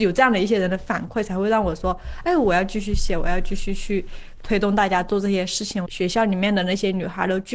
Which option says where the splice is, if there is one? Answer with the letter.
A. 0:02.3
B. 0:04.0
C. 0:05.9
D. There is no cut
C